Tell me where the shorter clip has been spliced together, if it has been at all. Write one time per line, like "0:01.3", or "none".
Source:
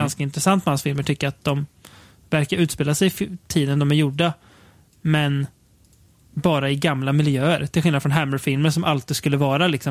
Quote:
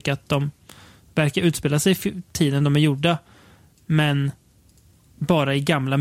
none